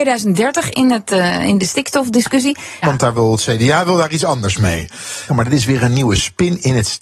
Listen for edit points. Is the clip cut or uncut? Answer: cut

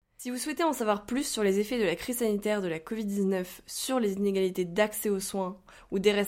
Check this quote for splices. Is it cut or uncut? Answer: uncut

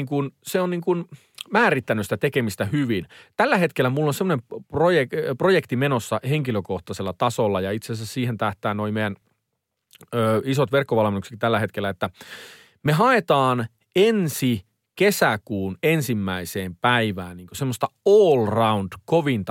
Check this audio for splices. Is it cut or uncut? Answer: uncut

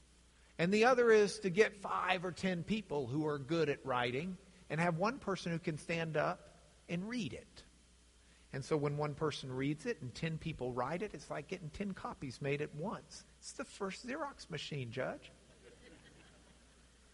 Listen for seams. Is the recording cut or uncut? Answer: cut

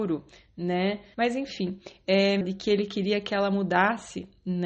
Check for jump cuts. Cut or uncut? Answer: cut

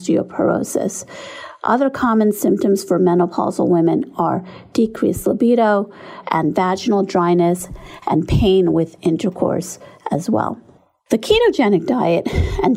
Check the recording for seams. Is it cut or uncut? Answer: uncut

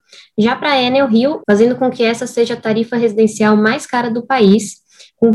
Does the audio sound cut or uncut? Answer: cut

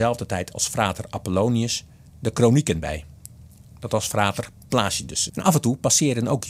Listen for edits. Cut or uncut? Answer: cut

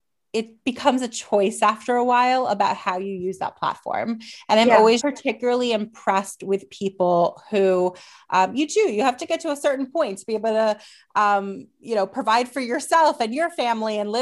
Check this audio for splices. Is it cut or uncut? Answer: cut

